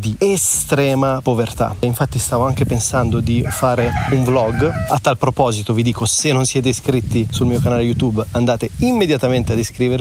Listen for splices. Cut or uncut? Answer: uncut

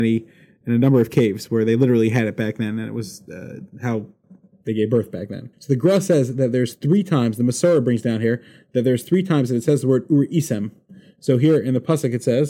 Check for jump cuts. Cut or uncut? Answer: cut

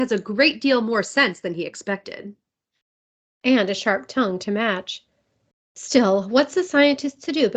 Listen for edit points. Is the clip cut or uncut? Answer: uncut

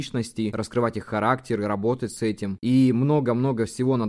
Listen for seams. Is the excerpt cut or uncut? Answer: uncut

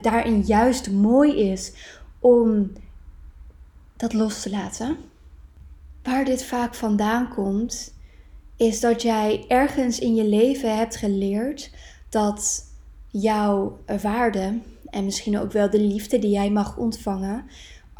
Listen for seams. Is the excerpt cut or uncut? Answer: uncut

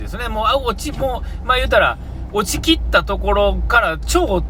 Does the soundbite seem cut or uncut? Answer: uncut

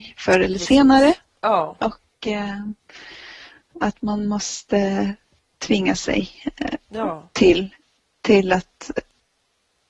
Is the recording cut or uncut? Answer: uncut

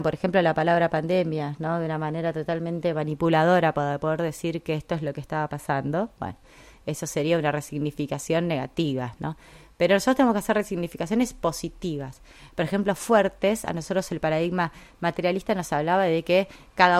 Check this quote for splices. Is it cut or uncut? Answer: uncut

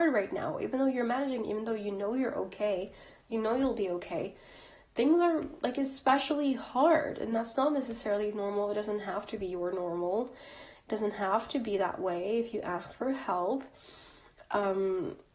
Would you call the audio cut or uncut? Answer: uncut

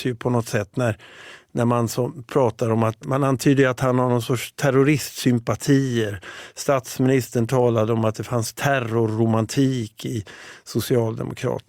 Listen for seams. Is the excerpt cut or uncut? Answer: cut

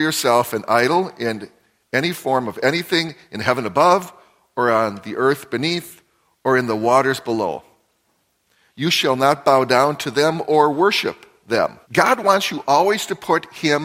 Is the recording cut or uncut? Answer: cut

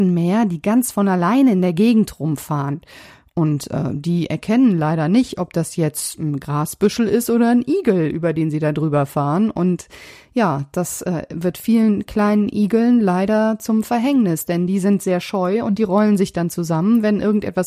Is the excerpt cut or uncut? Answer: uncut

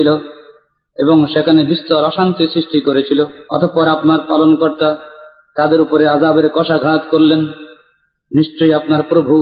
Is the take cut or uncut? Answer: cut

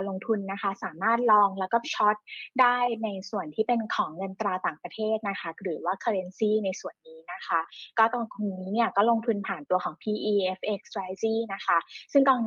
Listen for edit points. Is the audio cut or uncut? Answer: uncut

